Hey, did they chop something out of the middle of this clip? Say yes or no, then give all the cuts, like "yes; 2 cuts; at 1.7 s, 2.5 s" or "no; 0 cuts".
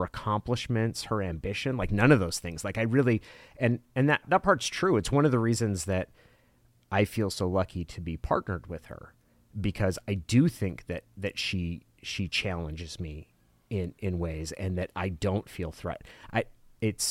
yes; 1 cut; at 4.2 s